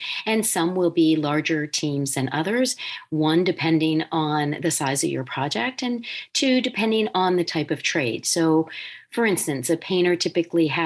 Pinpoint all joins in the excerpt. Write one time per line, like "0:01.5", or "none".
none